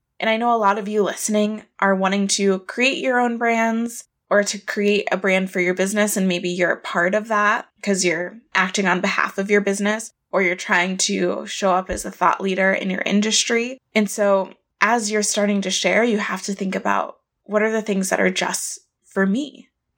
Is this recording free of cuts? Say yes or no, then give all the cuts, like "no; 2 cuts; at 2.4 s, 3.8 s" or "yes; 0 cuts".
yes; 0 cuts